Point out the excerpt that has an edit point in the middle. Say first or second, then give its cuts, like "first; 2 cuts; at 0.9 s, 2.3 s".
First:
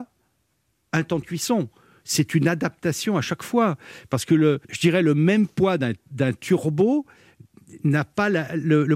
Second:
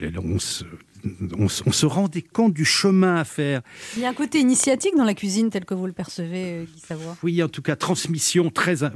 first; 1 cut; at 4.6 s